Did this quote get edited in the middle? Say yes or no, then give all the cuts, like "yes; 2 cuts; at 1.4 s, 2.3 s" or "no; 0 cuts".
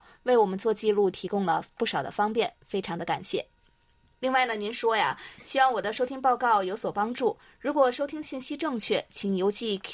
no; 0 cuts